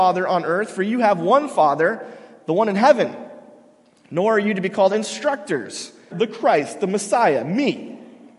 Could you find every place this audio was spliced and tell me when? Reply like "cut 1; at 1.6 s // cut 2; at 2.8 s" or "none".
cut 1; at 6.1 s